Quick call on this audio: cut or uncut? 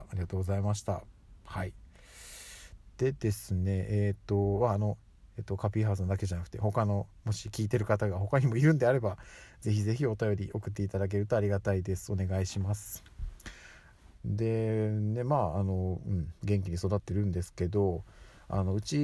cut